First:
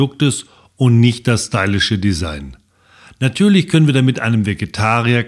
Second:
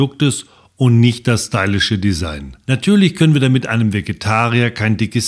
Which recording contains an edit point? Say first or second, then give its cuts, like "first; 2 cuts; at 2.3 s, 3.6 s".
second; 1 cut; at 2.6 s